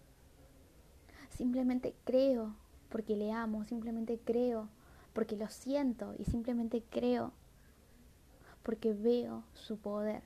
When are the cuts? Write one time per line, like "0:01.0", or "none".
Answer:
none